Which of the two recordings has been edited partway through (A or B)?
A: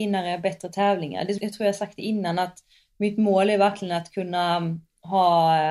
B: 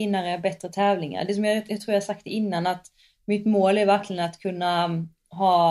A